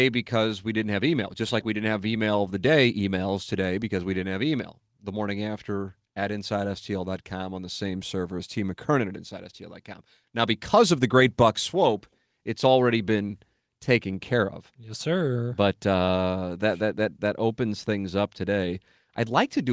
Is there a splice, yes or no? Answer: no